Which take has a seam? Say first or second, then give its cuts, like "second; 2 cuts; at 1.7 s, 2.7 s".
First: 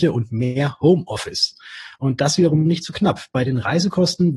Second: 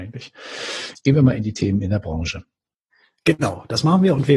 second; 1 cut; at 0.9 s